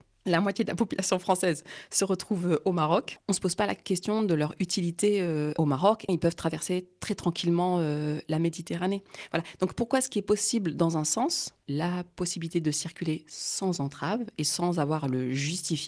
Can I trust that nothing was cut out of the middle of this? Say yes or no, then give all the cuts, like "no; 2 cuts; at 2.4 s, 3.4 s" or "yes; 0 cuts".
no; 3 cuts; at 3.2 s, 6.1 s, 11.6 s